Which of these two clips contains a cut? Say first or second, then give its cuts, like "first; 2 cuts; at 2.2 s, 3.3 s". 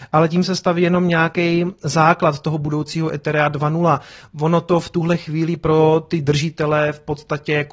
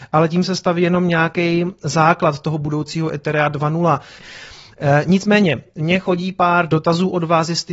second; 1 cut; at 4.2 s